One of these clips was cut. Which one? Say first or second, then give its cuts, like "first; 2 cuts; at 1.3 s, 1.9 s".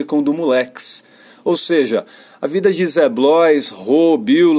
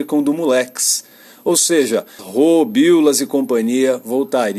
second; 1 cut; at 2.2 s